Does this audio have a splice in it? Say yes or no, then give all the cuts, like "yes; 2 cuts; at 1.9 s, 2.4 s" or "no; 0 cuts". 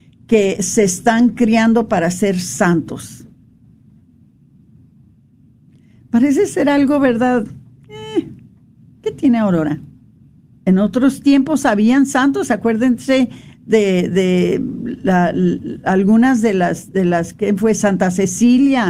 yes; 1 cut; at 10.5 s